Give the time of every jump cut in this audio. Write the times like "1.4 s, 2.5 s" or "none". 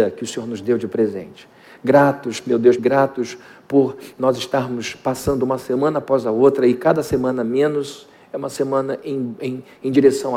2.8 s